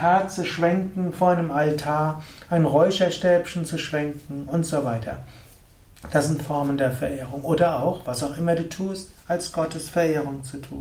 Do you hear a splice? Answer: no; 0 cuts

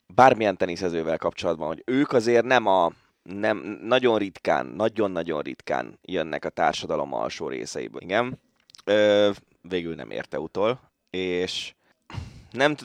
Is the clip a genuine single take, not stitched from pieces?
no; 1 cut; at 8.0 s

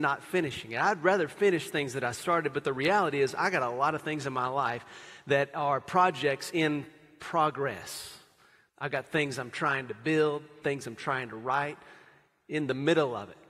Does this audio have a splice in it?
yes; 2 cuts; at 8.7 s, 10.6 s

